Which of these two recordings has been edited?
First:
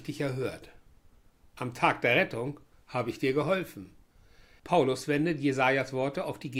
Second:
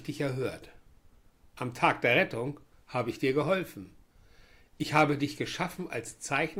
first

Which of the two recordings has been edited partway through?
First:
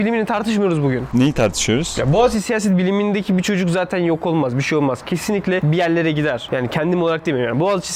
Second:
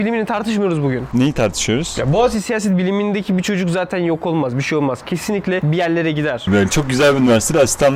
second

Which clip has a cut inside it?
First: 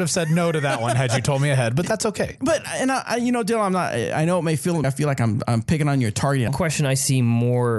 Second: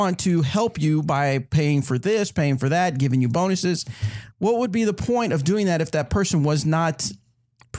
first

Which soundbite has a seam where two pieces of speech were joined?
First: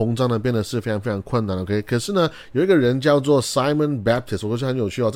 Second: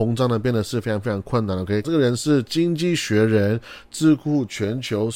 second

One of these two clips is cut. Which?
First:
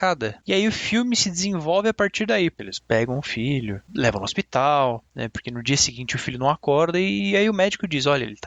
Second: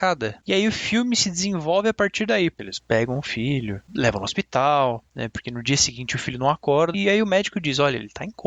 second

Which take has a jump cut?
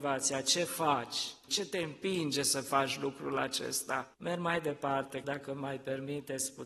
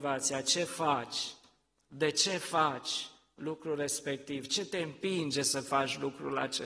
first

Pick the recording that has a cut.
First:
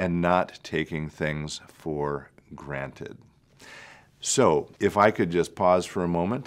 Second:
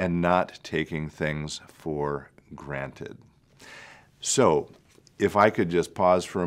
first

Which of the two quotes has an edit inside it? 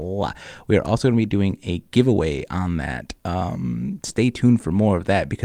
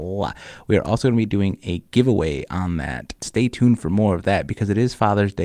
second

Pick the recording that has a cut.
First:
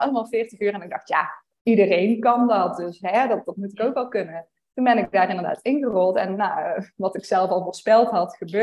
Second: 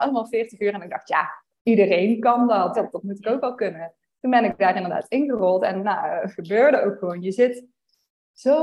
second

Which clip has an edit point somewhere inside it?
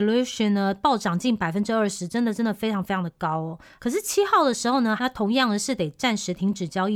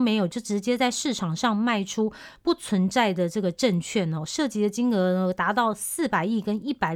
first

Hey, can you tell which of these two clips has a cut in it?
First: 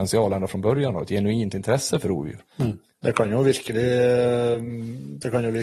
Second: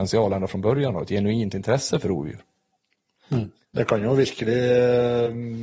first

